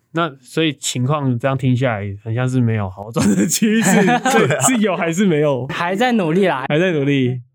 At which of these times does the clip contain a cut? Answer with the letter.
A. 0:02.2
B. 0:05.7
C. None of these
C